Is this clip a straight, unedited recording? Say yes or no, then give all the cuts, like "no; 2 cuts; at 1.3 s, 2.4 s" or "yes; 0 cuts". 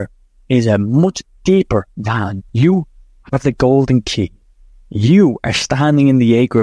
no; 1 cut; at 2.5 s